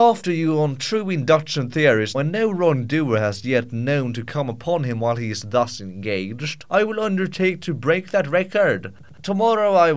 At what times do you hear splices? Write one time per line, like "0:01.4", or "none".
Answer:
0:02.1
0:06.6